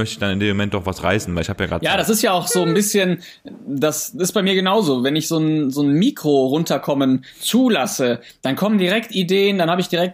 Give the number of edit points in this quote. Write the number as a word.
zero